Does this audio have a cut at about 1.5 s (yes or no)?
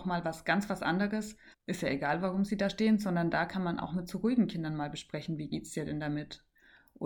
yes